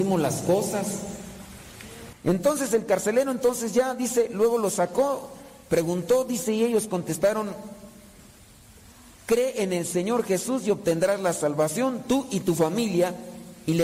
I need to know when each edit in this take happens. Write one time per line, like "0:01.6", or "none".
0:02.1